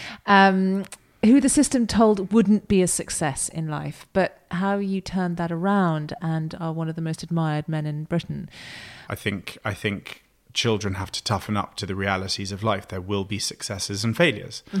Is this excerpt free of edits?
no; 1 cut; at 9.1 s

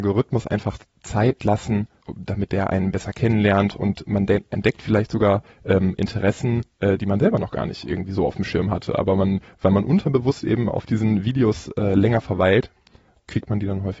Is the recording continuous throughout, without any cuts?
no; 1 cut; at 2.0 s

